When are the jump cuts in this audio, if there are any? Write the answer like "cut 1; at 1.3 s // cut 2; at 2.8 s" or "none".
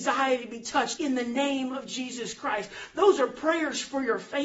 cut 1; at 1.0 s